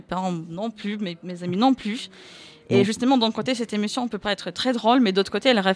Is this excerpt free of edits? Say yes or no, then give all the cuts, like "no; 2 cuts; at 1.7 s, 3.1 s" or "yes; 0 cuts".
yes; 0 cuts